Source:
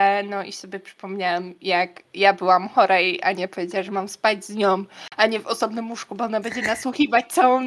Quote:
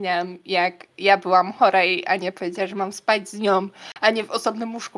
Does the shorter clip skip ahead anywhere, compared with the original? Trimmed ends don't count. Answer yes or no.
no